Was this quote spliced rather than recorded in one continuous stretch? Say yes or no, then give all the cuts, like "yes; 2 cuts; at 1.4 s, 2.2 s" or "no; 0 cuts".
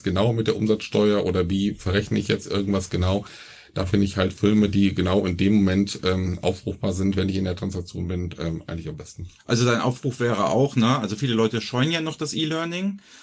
no; 0 cuts